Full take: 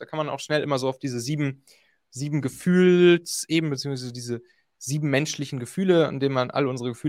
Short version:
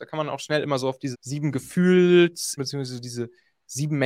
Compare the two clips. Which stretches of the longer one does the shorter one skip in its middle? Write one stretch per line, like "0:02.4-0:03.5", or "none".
0:01.1-0:02.0
0:03.5-0:03.7